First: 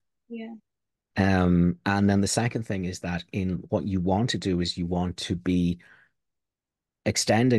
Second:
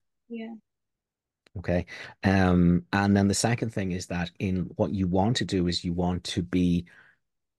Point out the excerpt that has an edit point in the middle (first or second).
first